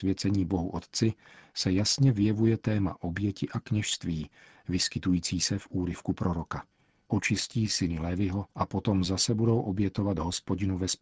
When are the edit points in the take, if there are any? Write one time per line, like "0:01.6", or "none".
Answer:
0:07.0
0:08.5

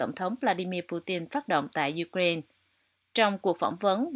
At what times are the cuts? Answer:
none

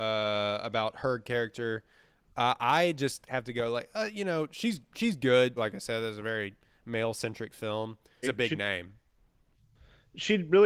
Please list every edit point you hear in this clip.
0:05.6
0:08.2

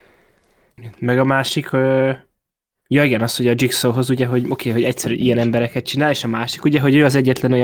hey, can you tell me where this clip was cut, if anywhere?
0:02.7

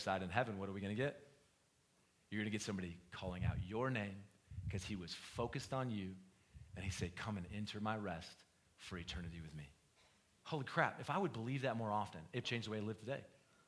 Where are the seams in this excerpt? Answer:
0:10.4
0:12.4

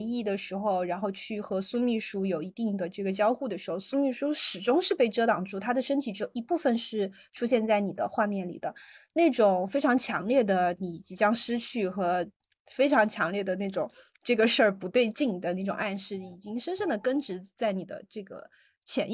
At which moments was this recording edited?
none

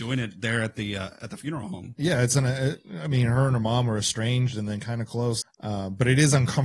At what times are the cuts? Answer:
0:05.4

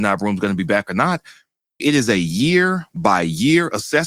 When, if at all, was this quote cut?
0:01.8

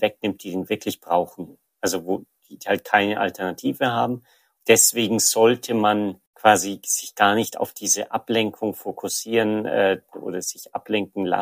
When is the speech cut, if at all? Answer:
0:04.6

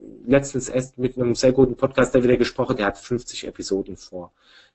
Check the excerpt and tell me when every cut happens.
0:02.7

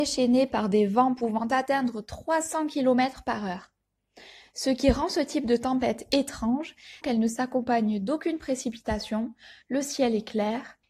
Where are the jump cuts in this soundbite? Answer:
0:07.0

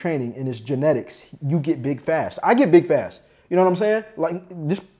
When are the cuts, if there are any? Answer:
none

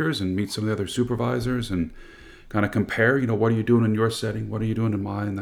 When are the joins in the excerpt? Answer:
none

